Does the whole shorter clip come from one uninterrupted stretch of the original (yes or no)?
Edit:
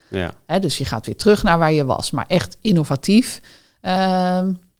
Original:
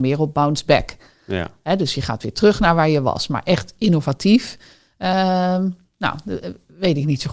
yes